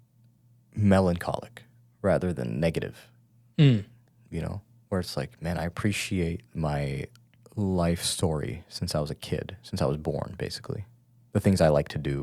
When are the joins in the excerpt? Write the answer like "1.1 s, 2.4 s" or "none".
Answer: none